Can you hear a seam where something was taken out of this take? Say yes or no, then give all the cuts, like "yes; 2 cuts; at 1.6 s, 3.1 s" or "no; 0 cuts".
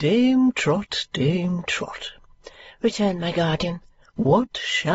no; 0 cuts